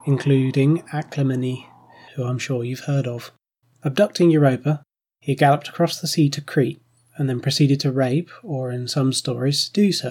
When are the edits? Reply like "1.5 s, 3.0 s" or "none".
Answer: 2.1 s, 3.6 s